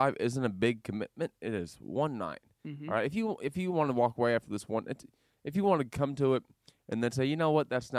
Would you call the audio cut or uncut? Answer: uncut